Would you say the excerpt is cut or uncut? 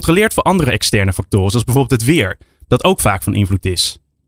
uncut